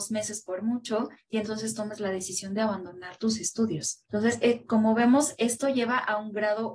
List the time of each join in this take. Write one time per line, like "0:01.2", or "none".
0:04.1